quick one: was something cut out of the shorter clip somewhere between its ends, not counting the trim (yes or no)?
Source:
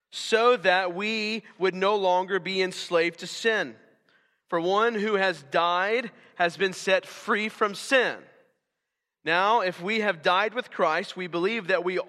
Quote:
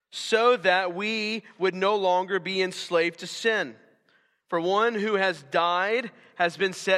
no